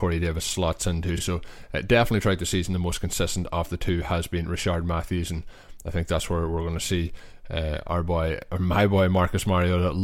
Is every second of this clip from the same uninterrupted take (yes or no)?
yes